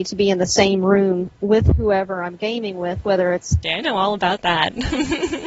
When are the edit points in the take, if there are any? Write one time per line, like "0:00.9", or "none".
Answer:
0:03.6